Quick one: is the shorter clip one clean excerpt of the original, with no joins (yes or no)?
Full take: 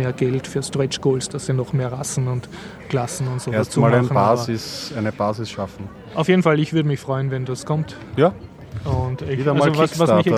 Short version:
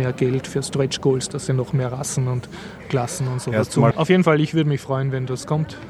no